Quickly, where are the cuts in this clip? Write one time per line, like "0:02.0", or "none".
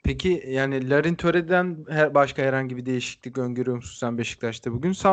none